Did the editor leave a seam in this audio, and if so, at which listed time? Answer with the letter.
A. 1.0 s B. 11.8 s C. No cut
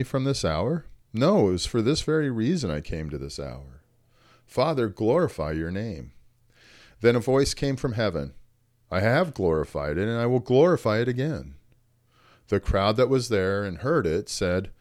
A